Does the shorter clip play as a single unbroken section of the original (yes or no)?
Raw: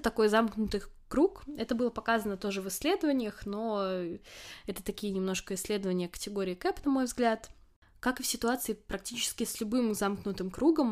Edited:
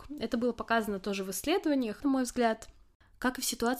no